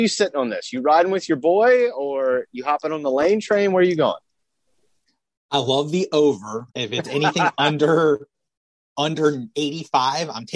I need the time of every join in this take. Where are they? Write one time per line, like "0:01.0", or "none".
0:06.7

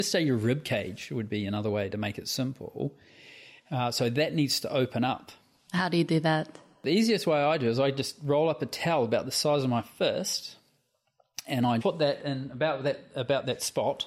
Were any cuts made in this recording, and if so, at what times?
0:11.8

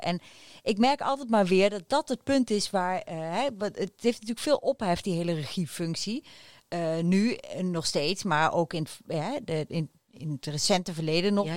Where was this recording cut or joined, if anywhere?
none

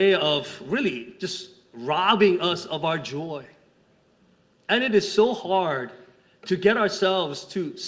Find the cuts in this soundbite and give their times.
none

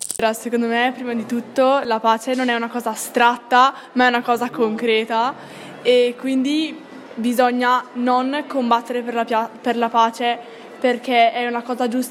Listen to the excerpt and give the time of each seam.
none

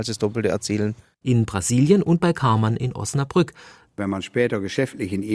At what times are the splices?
0:01.2
0:03.9

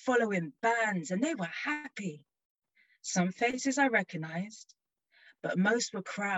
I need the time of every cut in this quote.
none

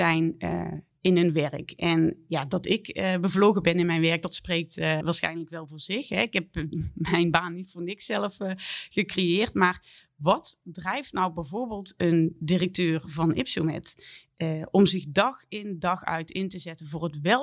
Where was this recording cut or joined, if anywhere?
0:05.0

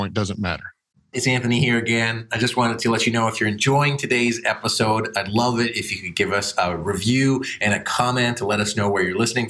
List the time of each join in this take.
0:01.1

